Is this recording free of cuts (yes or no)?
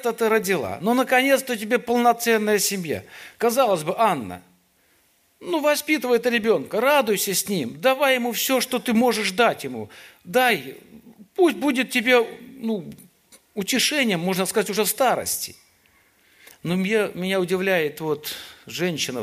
no